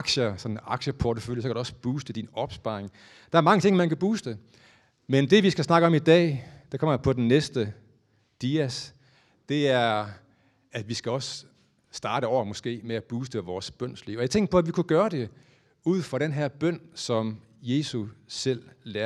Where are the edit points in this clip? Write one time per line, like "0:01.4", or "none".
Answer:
none